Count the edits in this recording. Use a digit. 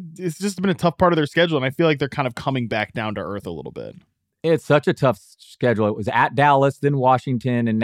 0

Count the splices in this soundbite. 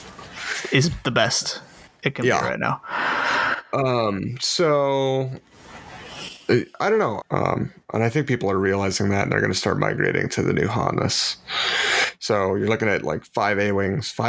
1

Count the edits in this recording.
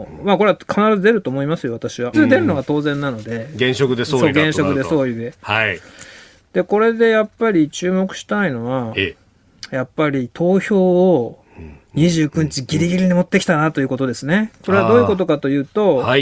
1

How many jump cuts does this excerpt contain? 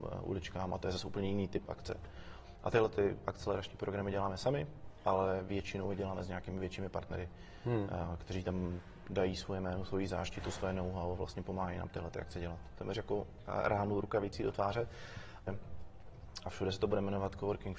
2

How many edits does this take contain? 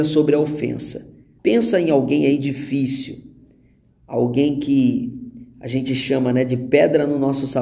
1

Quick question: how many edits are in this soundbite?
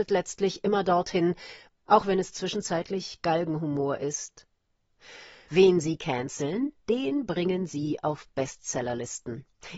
2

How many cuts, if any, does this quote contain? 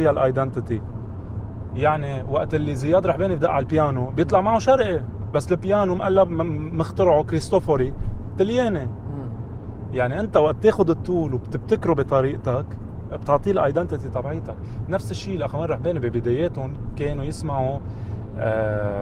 0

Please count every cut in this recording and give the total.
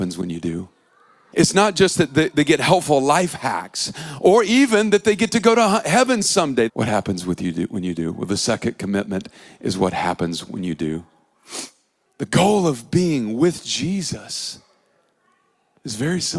3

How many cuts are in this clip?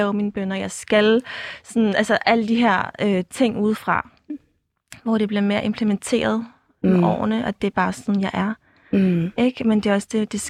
0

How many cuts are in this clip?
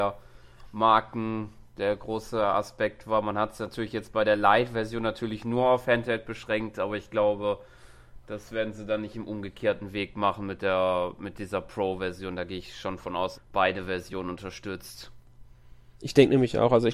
1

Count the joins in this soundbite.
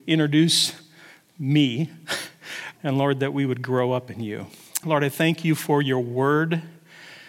2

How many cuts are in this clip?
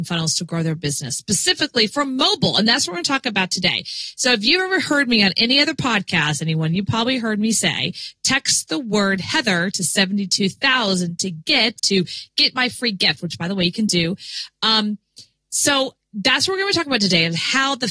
1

